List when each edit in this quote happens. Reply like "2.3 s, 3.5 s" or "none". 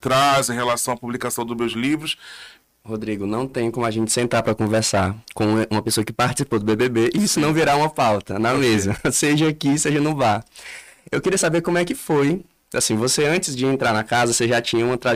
2.6 s